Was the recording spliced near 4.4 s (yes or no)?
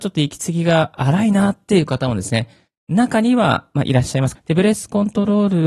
yes